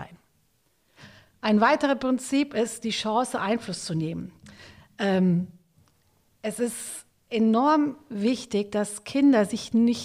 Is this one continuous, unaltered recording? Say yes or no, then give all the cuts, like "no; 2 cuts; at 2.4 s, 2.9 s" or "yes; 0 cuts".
yes; 0 cuts